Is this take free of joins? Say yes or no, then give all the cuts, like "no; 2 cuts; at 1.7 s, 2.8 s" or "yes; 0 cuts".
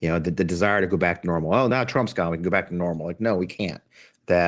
yes; 0 cuts